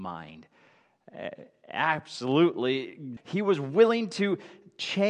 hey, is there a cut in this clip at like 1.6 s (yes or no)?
no